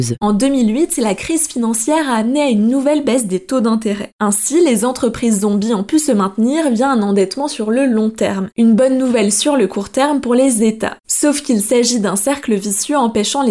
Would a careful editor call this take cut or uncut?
uncut